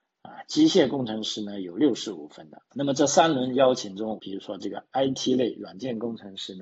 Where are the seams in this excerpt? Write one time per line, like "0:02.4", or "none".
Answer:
0:02.7
0:04.2